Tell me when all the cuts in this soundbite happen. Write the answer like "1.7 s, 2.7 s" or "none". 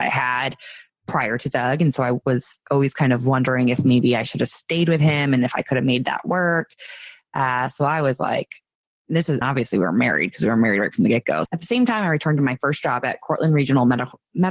9.4 s, 11.5 s